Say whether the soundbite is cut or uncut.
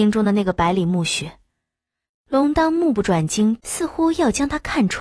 cut